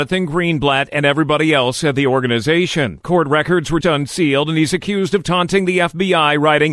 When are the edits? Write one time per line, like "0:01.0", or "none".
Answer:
0:03.8